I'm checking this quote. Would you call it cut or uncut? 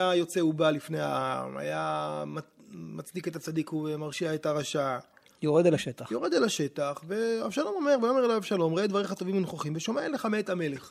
uncut